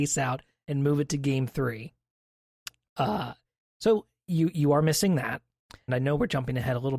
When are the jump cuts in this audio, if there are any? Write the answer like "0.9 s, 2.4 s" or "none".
2.9 s, 5.9 s